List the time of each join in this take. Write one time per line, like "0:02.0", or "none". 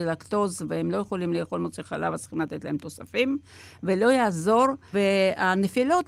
0:04.9